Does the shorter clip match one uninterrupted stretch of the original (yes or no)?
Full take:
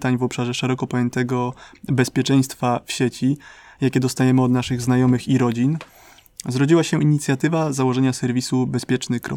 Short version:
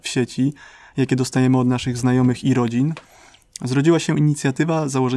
yes